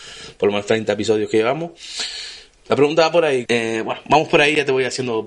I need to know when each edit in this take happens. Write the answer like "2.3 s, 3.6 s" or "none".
3.5 s